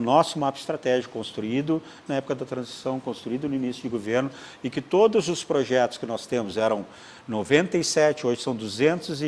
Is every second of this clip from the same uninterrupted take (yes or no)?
yes